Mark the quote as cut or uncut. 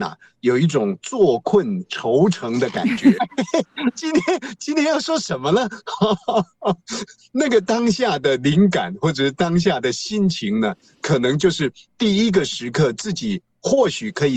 cut